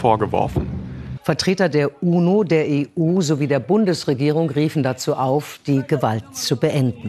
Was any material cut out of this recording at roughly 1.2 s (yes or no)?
yes